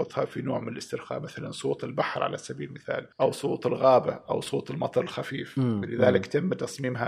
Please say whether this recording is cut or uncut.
cut